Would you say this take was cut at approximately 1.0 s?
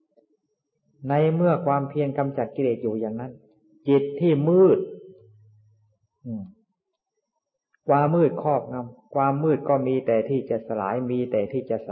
no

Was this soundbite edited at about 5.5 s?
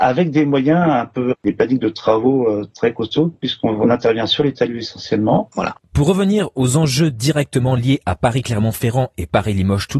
yes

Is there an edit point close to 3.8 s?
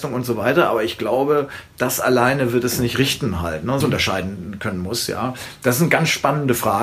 yes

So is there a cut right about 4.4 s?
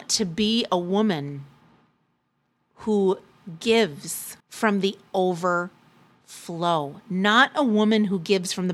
yes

